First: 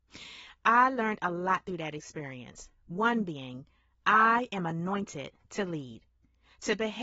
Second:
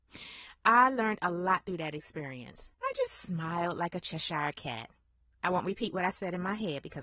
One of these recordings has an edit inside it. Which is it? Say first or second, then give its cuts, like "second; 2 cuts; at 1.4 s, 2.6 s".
second; 1 cut; at 2.7 s